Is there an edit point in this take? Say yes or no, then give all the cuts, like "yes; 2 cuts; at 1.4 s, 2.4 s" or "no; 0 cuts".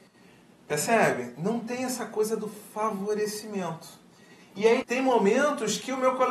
yes; 1 cut; at 4.8 s